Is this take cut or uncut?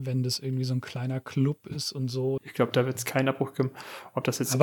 cut